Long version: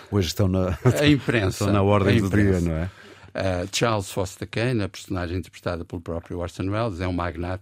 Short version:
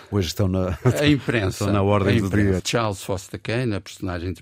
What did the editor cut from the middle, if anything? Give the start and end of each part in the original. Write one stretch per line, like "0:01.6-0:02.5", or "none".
0:02.6-0:03.7